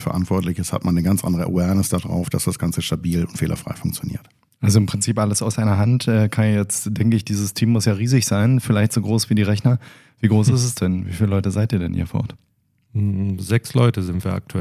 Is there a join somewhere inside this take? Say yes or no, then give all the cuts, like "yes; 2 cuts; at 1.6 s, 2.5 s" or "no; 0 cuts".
no; 0 cuts